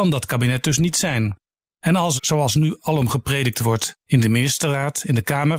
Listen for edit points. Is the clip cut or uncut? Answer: cut